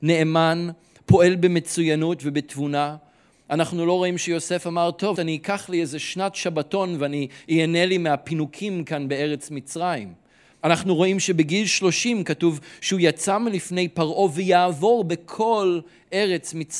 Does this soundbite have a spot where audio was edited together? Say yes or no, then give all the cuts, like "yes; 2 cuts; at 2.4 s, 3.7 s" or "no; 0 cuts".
yes; 2 cuts; at 5.1 s, 10.6 s